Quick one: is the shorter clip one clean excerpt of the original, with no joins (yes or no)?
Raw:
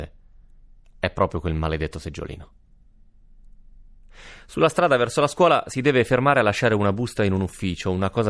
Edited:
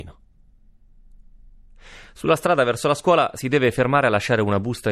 yes